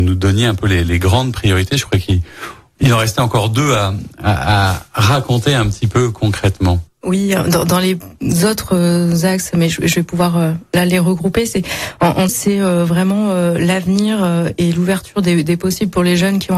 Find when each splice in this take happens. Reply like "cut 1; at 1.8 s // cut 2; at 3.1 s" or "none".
cut 1; at 12.3 s